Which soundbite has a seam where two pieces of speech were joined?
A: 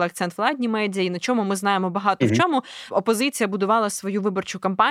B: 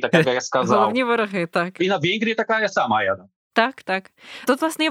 B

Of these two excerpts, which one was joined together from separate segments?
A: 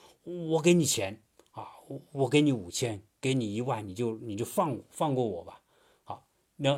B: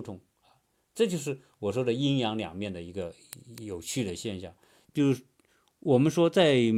B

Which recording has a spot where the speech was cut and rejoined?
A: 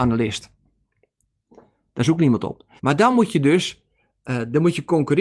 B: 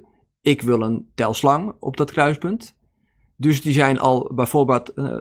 A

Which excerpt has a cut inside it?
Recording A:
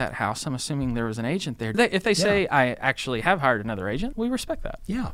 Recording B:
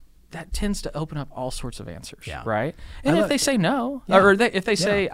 A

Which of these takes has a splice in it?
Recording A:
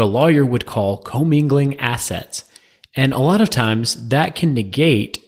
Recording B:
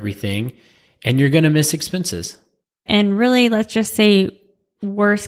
B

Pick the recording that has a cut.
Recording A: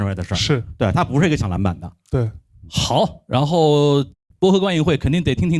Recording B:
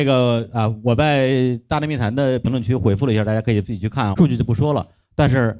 B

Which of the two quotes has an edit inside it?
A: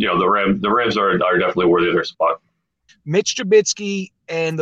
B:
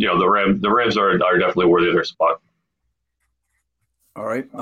A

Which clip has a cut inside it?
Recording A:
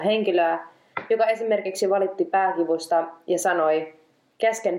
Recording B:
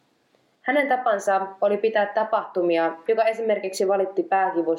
B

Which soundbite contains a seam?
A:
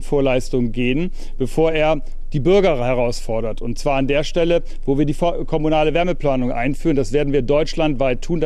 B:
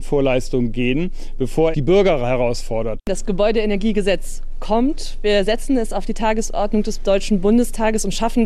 B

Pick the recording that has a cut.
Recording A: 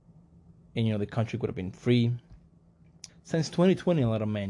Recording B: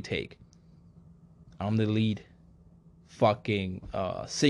A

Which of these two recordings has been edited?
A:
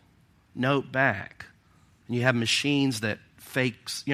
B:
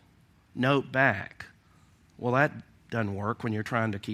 A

